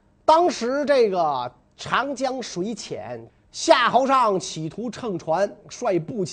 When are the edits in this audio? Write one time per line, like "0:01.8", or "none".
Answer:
0:03.3